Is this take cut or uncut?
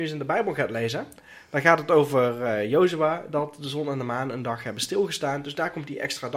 uncut